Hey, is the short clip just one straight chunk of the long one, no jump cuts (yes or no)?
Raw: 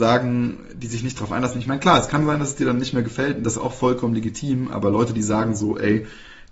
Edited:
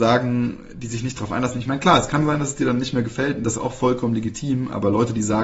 yes